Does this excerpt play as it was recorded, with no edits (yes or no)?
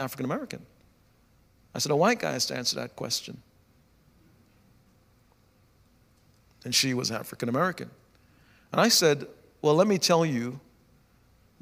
no